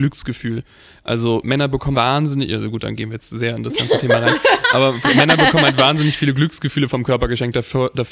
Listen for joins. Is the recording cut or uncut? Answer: cut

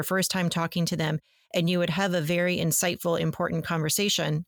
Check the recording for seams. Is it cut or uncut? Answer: uncut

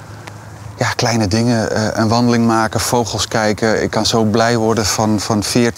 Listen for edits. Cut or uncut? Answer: uncut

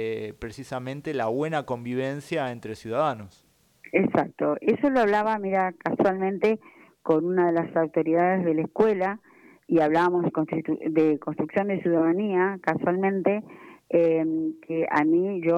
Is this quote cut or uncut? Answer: uncut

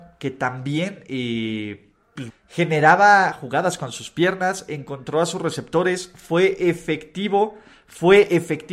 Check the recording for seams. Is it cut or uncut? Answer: cut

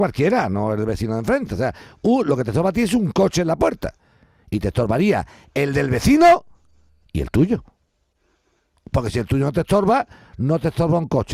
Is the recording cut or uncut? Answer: uncut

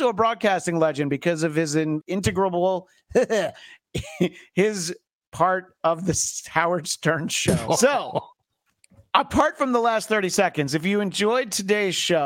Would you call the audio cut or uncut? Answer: cut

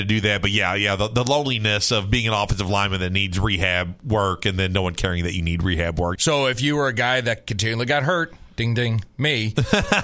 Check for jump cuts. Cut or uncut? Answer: cut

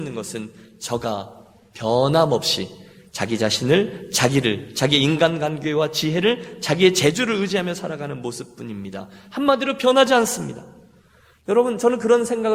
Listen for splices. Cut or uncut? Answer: uncut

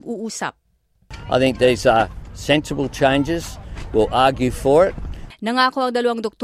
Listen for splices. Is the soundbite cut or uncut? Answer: cut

